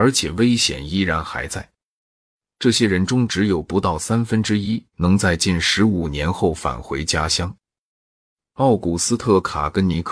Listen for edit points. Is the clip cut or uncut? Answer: cut